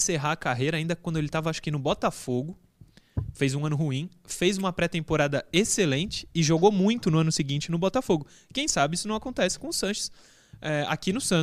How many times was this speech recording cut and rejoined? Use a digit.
0